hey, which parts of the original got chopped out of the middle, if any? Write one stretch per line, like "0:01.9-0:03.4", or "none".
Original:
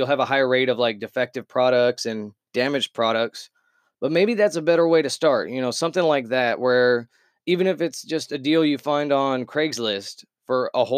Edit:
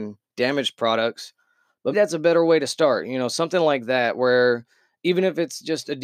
0:04.1-0:04.4